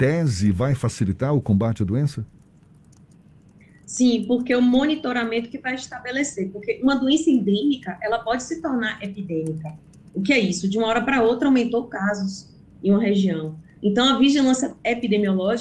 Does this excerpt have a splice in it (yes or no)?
no